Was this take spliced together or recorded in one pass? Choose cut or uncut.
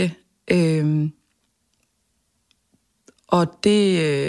uncut